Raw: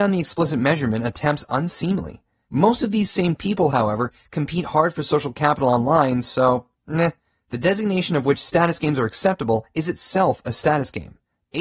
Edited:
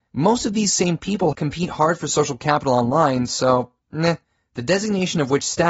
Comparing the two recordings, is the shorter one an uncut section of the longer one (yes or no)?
no